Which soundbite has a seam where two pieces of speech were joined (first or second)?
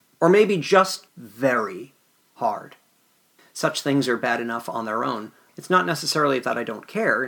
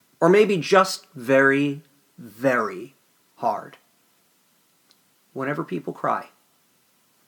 first